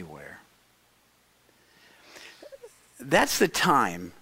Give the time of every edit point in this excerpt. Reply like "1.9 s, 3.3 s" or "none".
none